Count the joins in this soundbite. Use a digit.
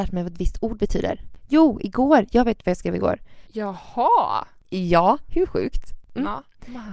1